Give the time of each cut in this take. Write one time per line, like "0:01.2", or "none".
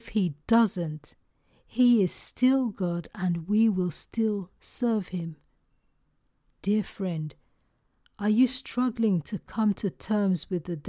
none